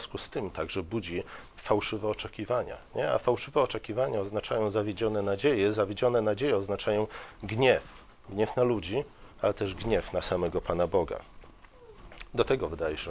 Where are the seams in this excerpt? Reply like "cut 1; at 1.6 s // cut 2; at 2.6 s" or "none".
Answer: cut 1; at 9.3 s